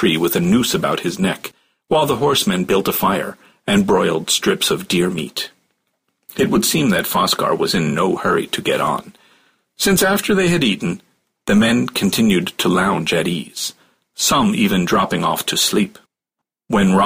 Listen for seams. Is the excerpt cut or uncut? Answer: uncut